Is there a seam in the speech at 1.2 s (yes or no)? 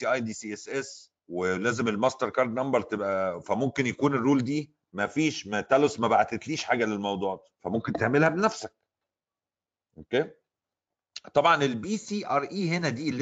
yes